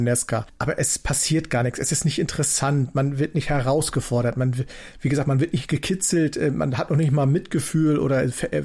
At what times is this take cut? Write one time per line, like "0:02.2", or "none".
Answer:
none